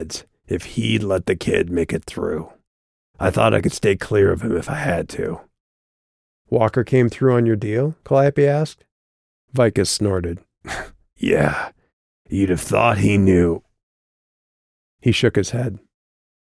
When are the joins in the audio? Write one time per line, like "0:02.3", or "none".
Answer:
none